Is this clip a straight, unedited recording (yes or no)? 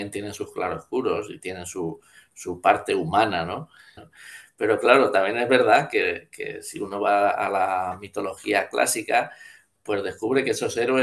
no